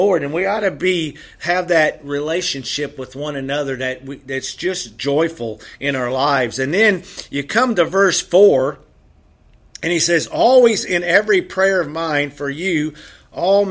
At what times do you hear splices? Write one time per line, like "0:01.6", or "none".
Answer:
none